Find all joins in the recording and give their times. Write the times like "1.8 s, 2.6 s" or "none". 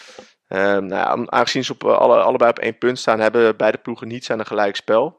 none